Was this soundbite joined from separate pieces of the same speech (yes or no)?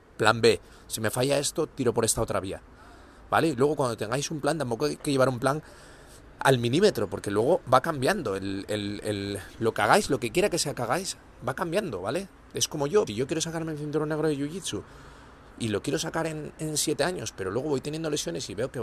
yes